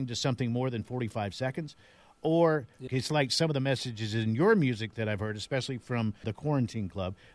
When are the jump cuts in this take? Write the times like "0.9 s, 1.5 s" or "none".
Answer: 2.9 s, 6.2 s